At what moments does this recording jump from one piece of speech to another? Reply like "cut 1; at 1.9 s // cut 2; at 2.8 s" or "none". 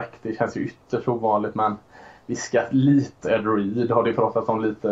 cut 1; at 3.2 s